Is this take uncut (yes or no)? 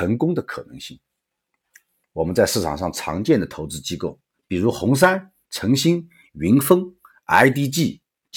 yes